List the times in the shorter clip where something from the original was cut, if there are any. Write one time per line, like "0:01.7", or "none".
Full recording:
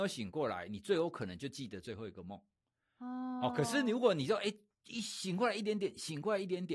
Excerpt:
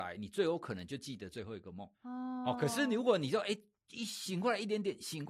0:01.9